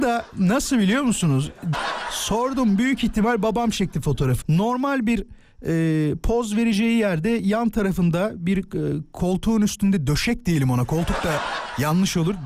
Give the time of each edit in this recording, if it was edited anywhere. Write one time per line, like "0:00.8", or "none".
0:01.7
0:04.4